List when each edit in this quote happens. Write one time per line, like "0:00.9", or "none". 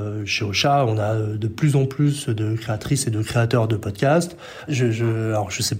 0:04.7